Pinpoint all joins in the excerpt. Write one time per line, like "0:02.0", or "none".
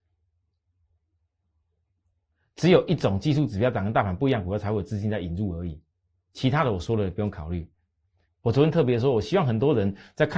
0:08.3